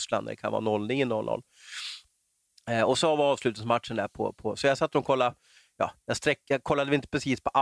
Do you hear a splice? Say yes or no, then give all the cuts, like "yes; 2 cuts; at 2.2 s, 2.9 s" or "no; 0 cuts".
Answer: no; 0 cuts